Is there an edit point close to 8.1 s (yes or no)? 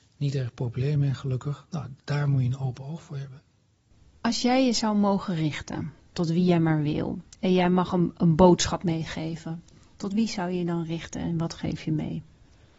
no